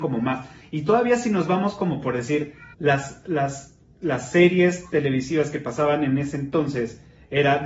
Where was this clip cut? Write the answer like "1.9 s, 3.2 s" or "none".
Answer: 2.7 s